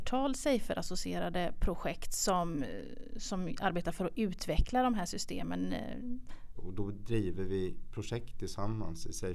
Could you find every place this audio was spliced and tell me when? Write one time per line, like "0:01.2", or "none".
0:06.6